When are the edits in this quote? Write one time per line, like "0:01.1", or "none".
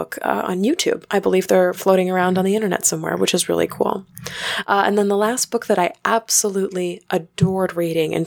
none